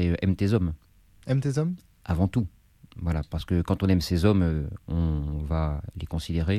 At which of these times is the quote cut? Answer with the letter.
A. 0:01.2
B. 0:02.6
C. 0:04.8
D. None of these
D